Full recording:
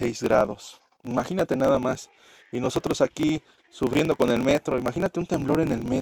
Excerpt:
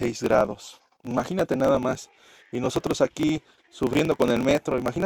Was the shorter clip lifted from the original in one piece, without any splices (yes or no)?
yes